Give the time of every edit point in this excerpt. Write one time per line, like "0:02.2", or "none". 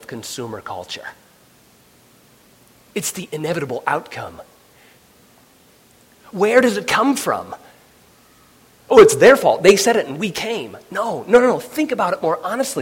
0:06.3